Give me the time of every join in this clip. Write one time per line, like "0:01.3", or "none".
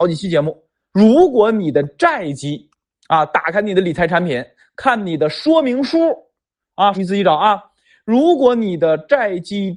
0:00.9
0:06.9